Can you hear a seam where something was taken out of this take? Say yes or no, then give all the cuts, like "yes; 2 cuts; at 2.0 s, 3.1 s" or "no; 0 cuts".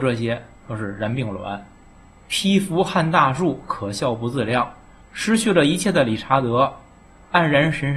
yes; 1 cut; at 5.0 s